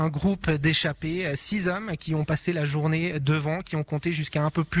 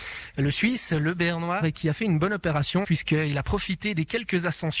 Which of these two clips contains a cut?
second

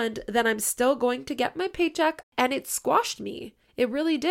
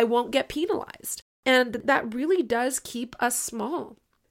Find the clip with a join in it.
first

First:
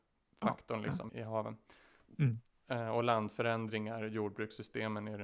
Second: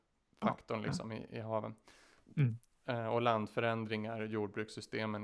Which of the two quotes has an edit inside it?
first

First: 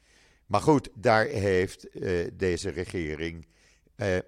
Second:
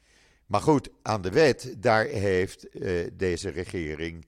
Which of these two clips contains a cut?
first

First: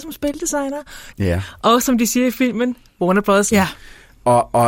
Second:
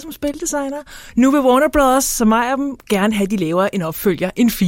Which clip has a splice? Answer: first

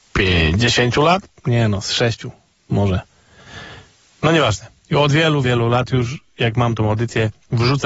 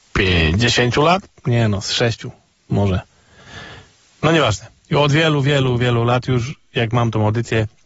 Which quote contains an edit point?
first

